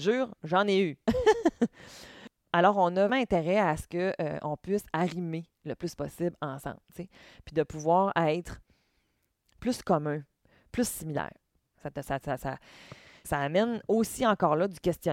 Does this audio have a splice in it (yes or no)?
yes